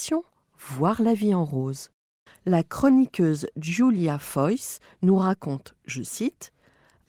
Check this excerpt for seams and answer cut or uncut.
cut